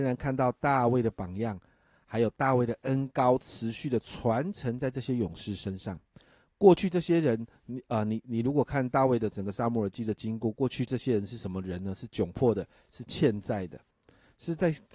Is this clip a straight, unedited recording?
yes; 0 cuts

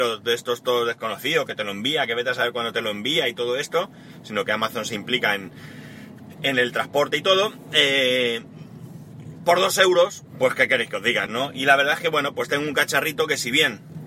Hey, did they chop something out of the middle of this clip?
yes; 1 cut; at 11.3 s

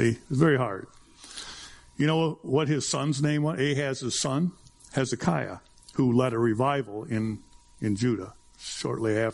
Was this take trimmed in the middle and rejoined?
no; 0 cuts

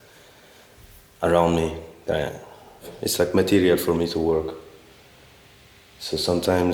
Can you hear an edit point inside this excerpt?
no; 0 cuts

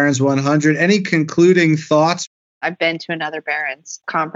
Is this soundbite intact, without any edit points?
yes; 0 cuts

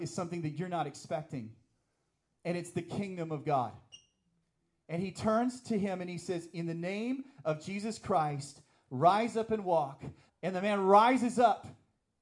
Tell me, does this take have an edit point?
yes; 1 cut; at 10.3 s

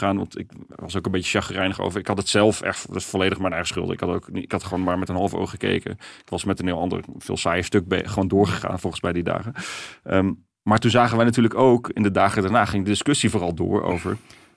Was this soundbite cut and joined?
no; 0 cuts

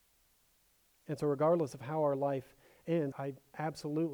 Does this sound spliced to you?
yes; 1 cut; at 3.1 s

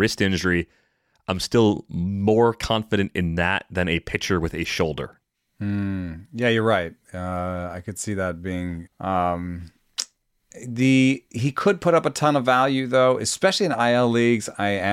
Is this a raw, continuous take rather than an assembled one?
no; 1 cut; at 8.9 s

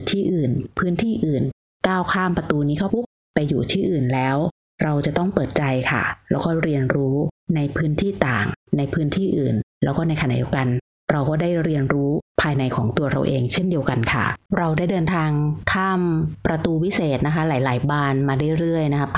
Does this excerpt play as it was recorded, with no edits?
no; 2 cuts; at 2.9 s, 14.5 s

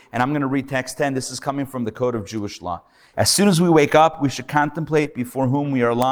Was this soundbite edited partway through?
yes; 1 cut; at 3.1 s

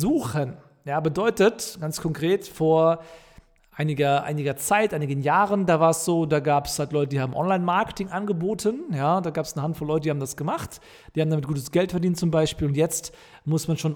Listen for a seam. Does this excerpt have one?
no; 0 cuts

